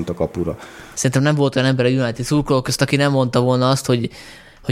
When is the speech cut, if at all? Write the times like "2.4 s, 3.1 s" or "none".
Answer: 0.9 s